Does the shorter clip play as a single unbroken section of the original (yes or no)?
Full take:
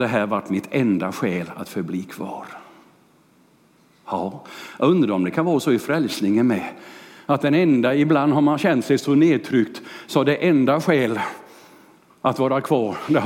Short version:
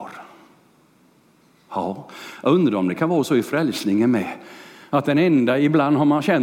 yes